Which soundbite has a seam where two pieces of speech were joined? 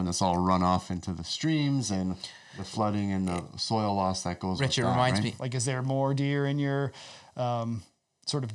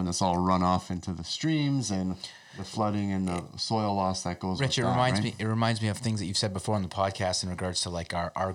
first; 1 cut; at 5.4 s

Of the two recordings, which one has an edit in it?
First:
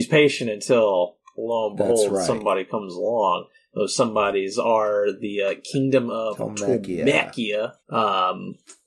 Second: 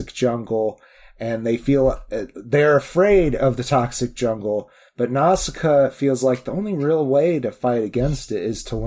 first; 1 cut; at 7.8 s

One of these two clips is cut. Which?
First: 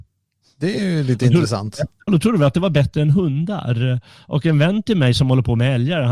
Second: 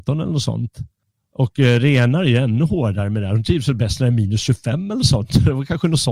first; 1 cut; at 2.1 s

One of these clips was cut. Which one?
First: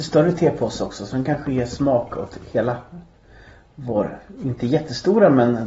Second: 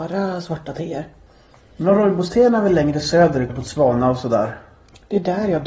second; 1 cut; at 3.5 s

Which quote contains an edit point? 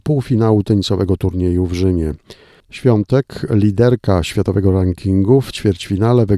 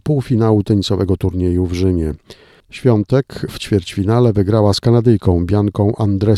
second; 1 cut; at 3.5 s

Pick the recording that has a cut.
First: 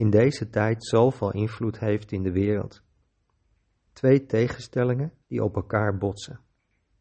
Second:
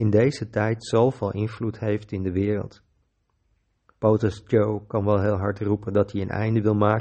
first; 2 cuts; at 3.9 s, 5.2 s

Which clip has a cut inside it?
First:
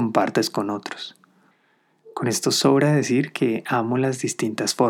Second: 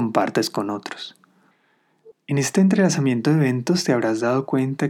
second; 1 cut; at 2.1 s

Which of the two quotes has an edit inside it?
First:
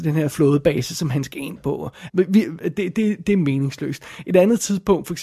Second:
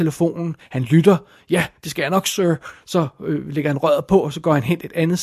first; 1 cut; at 2.1 s

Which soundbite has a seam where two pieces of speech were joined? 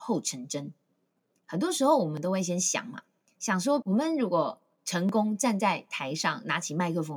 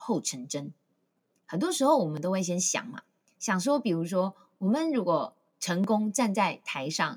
first; 1 cut; at 3.8 s

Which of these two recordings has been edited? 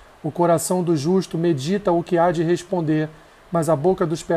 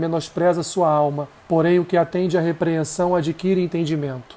second; 1 cut; at 1.4 s

